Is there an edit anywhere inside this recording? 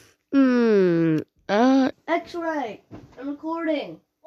yes; 1 cut; at 1.9 s

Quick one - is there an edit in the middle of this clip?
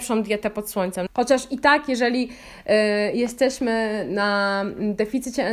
yes; 1 cut; at 1.1 s

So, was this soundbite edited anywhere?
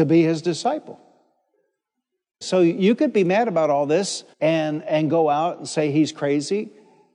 yes; 2 cuts; at 2.4 s, 4.3 s

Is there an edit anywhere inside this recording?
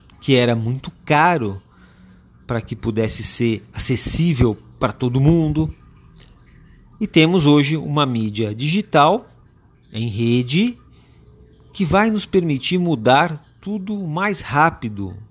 no; 0 cuts

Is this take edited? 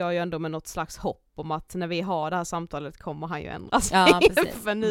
no; 0 cuts

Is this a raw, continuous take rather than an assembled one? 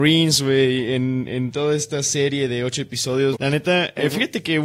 no; 1 cut; at 3.3 s

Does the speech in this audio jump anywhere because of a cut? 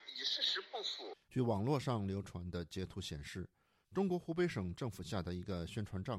yes; 1 cut; at 1.1 s

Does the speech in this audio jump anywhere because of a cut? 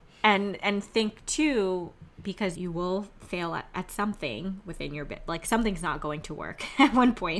yes; 1 cut; at 2.5 s

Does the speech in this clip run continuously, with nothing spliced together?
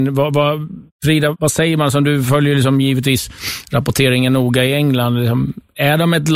no; 1 cut; at 1.3 s

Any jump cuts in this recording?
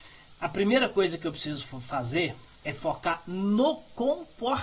no; 0 cuts

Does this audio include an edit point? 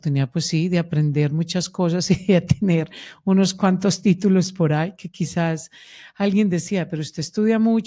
no; 0 cuts

